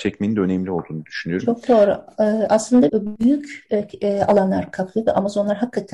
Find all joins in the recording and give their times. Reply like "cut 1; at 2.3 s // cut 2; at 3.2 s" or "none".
cut 1; at 2.9 s